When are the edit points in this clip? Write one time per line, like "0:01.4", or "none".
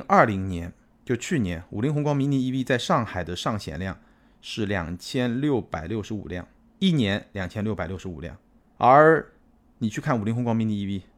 none